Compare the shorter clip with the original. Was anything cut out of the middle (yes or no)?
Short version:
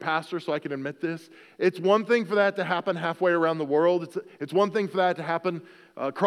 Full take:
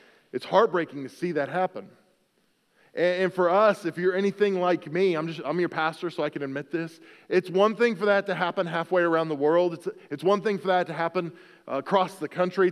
no